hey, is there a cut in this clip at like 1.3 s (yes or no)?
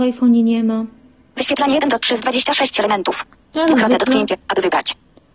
yes